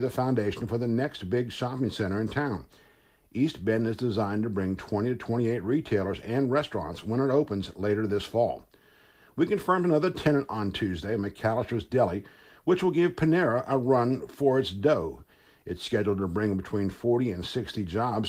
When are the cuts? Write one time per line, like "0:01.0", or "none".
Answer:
none